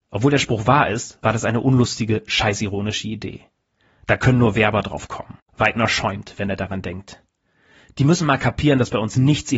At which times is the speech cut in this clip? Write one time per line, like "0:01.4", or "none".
none